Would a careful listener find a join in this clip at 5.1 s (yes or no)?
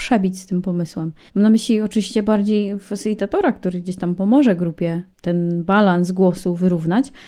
yes